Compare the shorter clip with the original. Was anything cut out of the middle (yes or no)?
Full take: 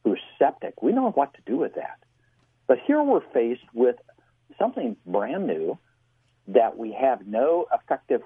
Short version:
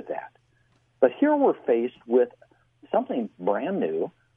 no